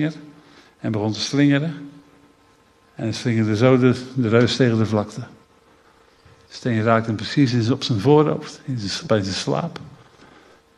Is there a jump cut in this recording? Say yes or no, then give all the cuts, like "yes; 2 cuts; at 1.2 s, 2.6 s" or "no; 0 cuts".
no; 0 cuts